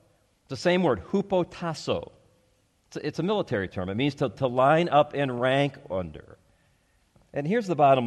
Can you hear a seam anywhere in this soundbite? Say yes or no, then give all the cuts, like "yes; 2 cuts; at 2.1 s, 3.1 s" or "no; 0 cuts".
no; 0 cuts